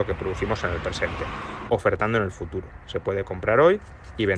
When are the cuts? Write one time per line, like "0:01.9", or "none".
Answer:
0:01.7